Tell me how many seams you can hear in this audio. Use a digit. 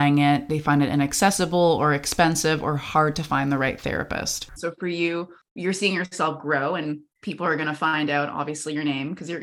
1